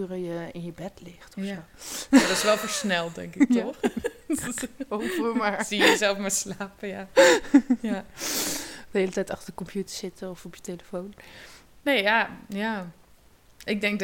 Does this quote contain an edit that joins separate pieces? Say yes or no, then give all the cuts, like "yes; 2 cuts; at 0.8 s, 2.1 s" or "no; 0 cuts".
no; 0 cuts